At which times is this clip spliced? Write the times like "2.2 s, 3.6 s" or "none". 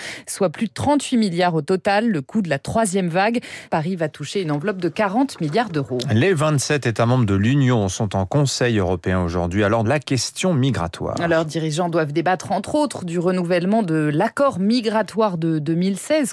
3.7 s, 9.8 s